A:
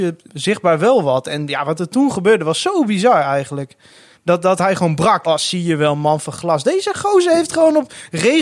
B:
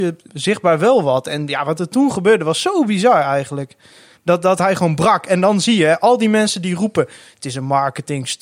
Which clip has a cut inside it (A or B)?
A